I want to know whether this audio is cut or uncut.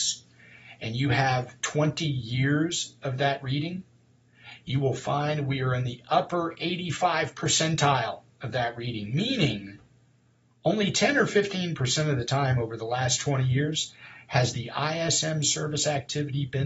cut